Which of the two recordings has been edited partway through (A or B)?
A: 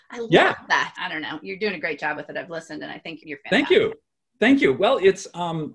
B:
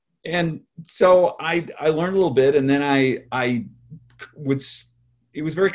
A